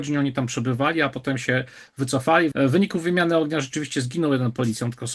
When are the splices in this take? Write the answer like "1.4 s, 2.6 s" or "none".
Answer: 2.5 s